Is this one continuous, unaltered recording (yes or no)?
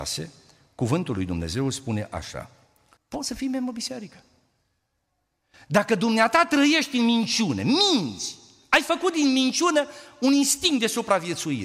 no